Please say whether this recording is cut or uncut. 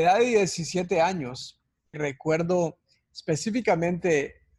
cut